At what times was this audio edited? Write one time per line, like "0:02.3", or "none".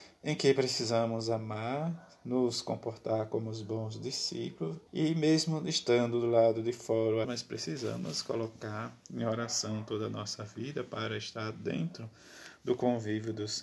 0:04.9
0:07.2